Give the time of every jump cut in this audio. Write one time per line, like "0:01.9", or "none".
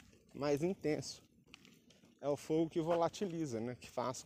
none